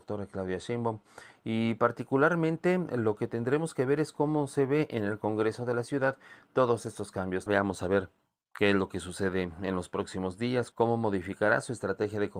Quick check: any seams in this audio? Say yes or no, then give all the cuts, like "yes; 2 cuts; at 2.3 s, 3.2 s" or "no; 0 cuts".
yes; 2 cuts; at 7.5 s, 10.7 s